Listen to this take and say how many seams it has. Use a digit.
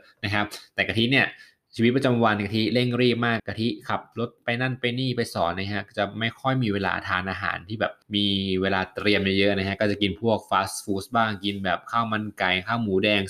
2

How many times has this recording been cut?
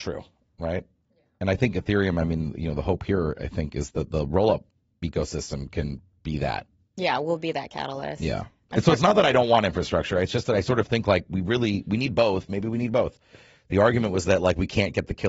0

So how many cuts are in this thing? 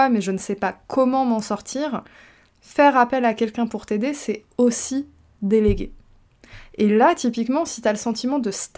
0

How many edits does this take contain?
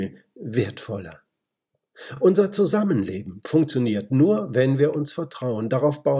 0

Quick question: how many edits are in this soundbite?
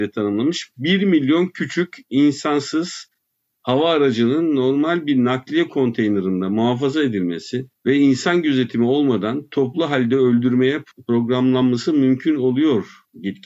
1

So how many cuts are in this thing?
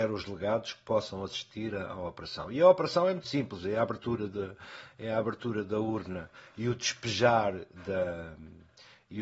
0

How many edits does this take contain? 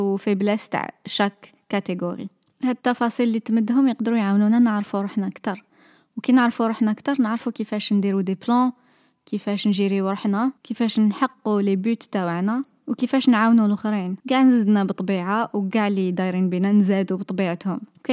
2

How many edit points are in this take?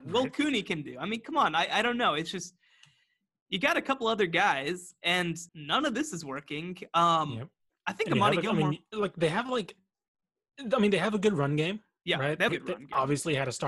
2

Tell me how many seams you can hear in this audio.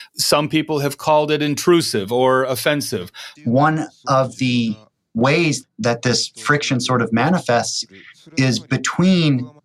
1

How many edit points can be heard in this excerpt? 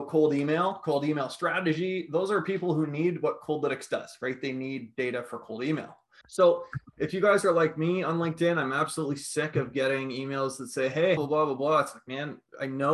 2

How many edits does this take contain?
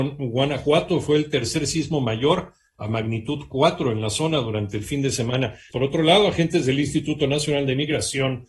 1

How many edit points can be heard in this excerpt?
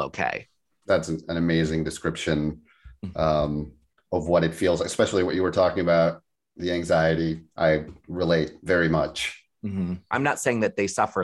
2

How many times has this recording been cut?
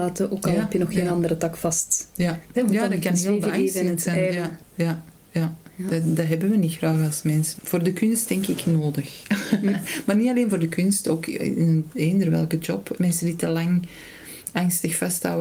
3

